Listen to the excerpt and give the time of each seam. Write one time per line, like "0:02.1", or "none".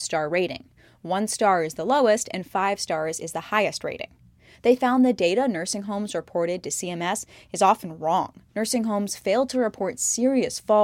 0:04.5
0:08.5